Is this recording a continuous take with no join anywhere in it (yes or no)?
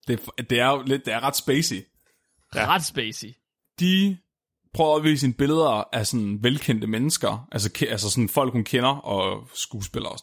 yes